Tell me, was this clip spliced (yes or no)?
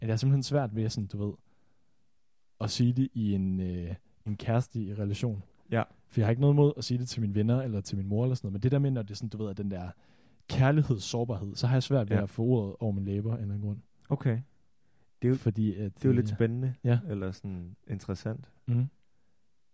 no